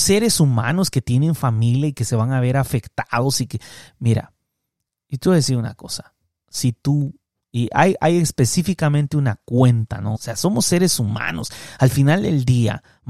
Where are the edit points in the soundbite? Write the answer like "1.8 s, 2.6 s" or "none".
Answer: 10.1 s